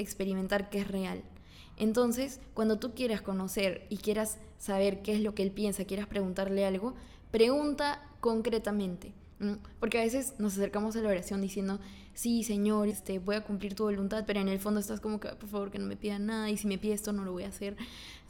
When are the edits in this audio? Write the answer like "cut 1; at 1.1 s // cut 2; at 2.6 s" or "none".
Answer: cut 1; at 12.9 s